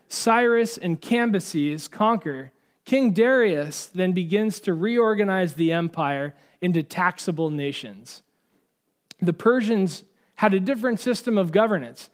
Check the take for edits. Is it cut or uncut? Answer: uncut